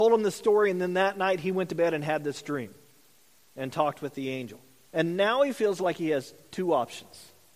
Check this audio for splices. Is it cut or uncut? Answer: cut